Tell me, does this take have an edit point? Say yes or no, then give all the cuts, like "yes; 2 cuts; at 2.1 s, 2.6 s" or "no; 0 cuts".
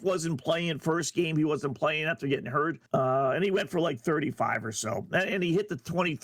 yes; 1 cut; at 2.9 s